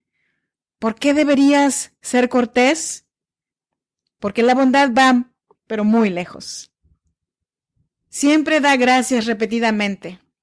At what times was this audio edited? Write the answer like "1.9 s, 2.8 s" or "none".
5.6 s